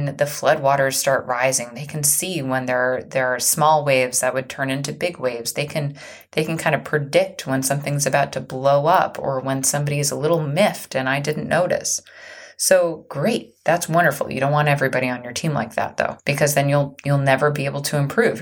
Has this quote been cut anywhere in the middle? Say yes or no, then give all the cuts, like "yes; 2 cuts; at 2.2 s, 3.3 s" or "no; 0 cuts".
no; 0 cuts